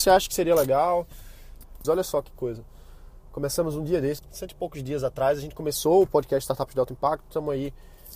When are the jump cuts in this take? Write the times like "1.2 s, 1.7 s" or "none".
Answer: 1.8 s, 4.2 s